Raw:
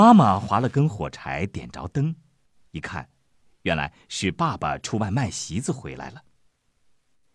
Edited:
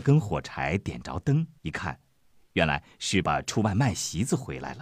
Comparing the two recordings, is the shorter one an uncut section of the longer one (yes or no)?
no